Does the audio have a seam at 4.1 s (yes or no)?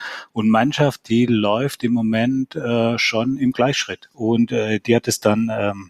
yes